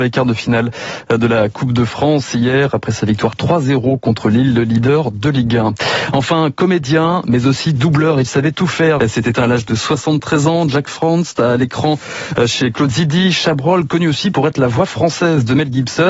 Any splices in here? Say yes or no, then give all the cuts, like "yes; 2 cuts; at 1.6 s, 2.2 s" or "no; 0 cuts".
yes; 1 cut; at 9.0 s